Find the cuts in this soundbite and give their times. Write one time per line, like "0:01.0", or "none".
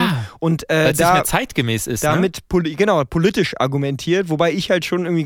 none